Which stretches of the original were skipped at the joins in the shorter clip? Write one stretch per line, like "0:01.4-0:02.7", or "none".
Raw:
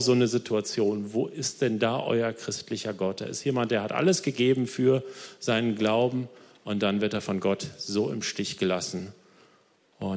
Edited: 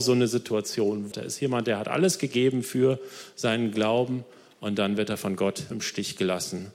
0:01.1-0:03.2
0:07.7-0:08.1